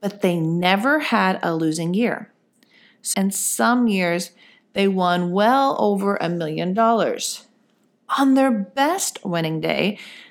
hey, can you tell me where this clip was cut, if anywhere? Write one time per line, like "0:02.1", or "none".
0:03.1